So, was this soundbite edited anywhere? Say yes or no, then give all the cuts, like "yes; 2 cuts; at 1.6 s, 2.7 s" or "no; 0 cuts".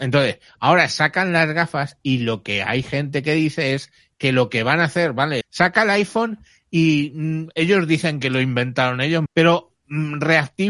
yes; 2 cuts; at 5.4 s, 9.3 s